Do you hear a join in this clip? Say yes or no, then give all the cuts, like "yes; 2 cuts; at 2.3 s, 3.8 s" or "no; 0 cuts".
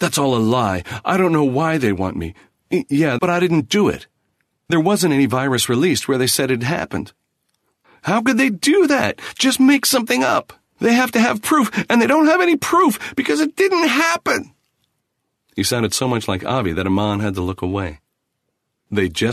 yes; 2 cuts; at 3.2 s, 10.8 s